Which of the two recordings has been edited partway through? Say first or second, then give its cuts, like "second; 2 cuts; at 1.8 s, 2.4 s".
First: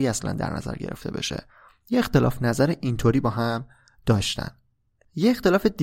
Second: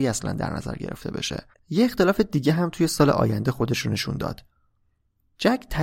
second; 1 cut; at 1.5 s